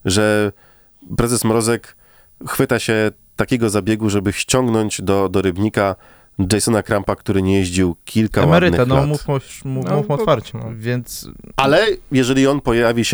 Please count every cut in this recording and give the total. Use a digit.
1